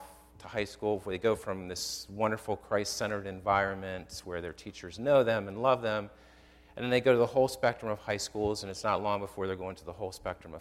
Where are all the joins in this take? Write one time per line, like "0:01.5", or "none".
none